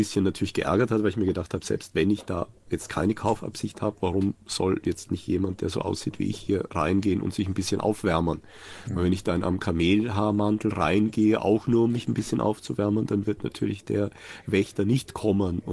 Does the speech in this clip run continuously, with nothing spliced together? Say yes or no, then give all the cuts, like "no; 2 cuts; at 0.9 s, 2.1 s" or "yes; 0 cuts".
yes; 0 cuts